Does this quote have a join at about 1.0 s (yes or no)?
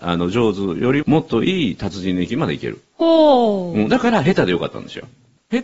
yes